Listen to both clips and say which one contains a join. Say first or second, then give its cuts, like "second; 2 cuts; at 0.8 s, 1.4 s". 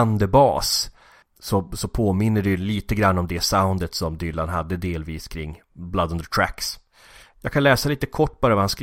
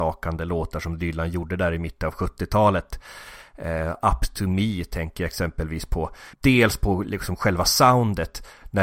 second; 1 cut; at 6.4 s